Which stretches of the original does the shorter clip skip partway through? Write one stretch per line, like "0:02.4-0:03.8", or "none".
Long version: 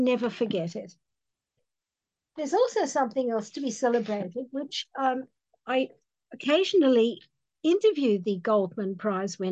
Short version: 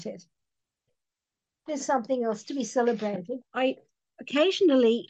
0:02.5-0:02.9
0:04.5-0:05.5